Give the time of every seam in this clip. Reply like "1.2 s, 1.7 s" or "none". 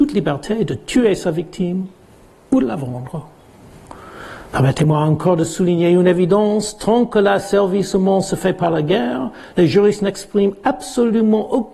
none